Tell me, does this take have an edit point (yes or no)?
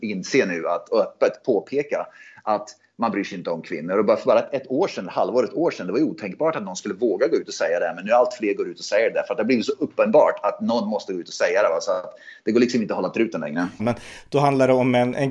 yes